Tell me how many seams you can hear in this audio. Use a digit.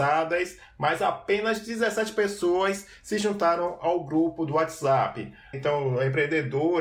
1